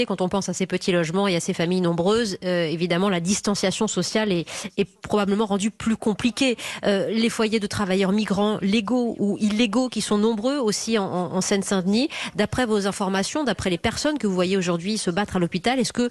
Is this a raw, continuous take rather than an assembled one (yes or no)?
yes